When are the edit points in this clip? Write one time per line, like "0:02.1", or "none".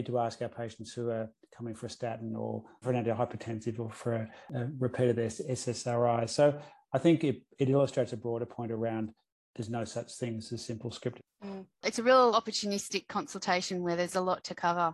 none